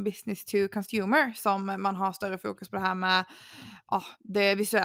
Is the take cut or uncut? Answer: uncut